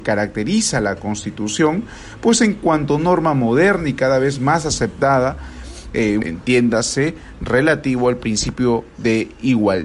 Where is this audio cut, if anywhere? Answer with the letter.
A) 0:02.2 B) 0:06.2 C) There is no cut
B